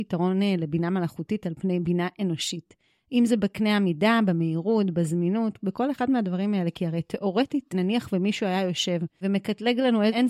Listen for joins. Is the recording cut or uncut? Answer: uncut